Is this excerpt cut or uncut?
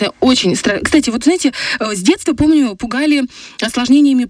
uncut